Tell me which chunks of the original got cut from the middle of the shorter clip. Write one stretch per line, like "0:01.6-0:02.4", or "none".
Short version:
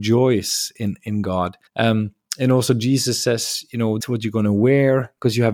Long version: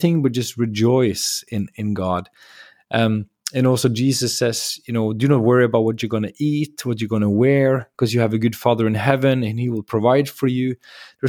0:02.4-0:02.8
0:05.1-0:06.8